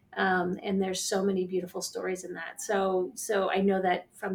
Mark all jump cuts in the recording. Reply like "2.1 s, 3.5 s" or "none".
none